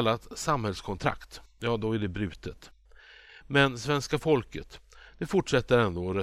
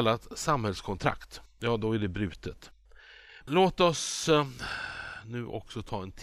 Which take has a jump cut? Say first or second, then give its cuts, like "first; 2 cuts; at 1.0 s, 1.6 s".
second; 1 cut; at 3.5 s